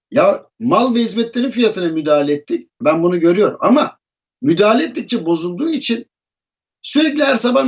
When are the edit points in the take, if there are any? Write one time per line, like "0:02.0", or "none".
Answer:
0:02.8